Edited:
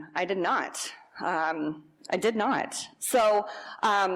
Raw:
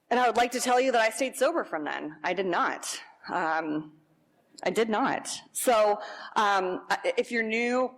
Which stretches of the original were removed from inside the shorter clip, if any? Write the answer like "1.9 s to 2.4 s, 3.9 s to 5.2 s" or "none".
4.1 s to 4.5 s